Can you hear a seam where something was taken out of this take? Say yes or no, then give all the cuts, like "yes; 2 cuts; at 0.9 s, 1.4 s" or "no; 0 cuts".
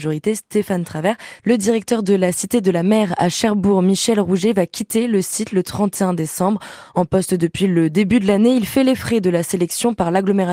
yes; 1 cut; at 1.4 s